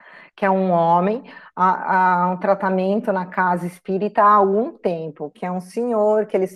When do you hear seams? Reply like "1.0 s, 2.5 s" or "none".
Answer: none